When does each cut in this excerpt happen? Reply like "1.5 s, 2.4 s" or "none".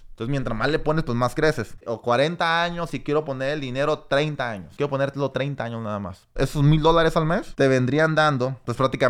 1.8 s

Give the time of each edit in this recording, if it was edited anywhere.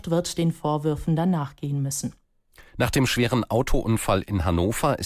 2.7 s

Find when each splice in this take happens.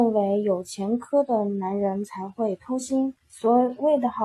3.2 s

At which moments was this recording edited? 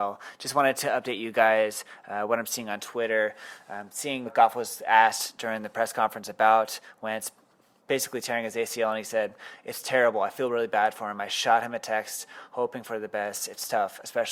4.3 s

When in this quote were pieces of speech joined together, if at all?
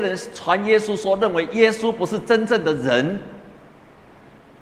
none

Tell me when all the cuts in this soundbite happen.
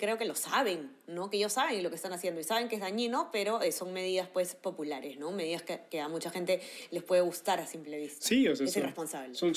none

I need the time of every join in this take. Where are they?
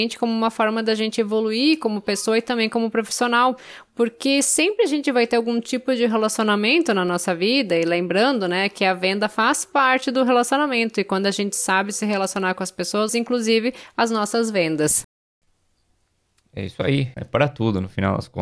13.1 s, 17.1 s

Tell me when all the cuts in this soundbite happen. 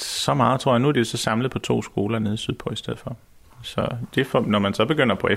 3.4 s

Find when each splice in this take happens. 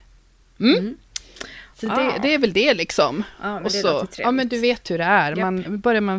none

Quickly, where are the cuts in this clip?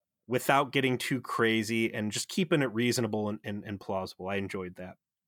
none

